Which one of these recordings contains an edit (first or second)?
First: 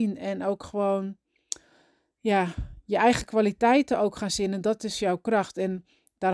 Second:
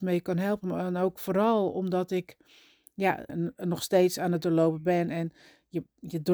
second